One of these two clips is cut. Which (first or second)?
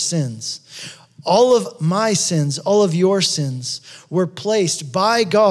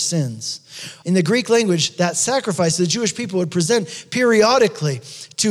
second